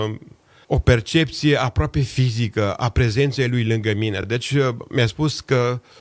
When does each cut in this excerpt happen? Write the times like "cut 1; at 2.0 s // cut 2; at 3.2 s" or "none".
none